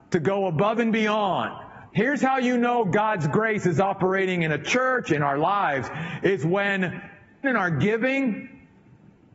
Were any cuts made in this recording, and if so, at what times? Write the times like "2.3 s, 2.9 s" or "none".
1.9 s, 7.4 s